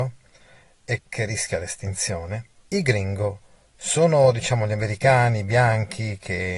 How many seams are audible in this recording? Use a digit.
2